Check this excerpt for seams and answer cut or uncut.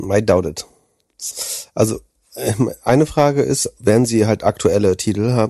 uncut